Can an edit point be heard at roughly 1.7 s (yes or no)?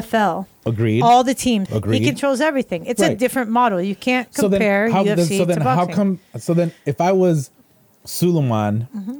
yes